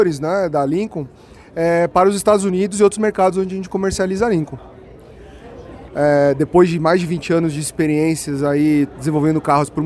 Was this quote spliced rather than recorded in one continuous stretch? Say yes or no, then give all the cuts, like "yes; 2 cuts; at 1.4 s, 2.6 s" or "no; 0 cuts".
yes; 1 cut; at 5.9 s